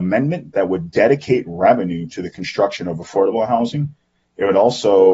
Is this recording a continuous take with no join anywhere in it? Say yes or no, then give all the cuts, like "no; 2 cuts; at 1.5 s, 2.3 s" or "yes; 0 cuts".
yes; 0 cuts